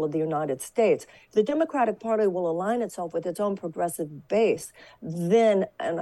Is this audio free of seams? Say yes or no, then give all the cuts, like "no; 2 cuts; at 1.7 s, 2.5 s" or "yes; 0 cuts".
yes; 0 cuts